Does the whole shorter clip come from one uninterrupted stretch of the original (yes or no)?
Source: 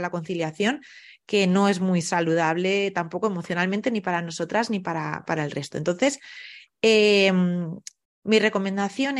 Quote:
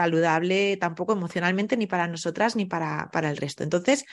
yes